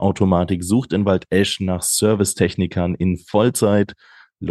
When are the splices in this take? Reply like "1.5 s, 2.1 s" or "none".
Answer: none